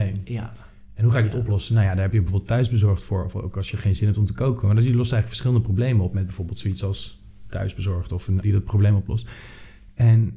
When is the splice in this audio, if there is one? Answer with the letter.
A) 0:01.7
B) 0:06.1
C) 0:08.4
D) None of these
C